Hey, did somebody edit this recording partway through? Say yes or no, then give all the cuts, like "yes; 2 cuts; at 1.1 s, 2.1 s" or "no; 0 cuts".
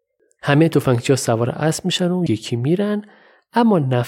yes; 1 cut; at 2.3 s